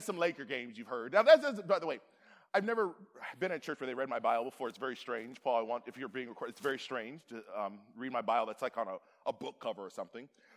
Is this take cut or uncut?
uncut